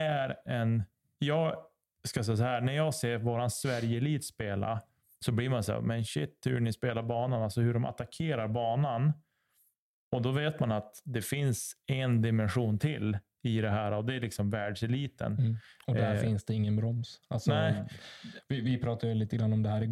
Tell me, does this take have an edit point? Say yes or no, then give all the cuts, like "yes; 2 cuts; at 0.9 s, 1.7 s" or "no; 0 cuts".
no; 0 cuts